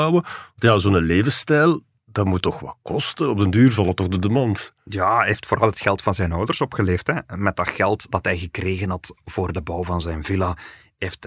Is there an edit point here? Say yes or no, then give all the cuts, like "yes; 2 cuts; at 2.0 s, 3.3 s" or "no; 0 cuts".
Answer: no; 0 cuts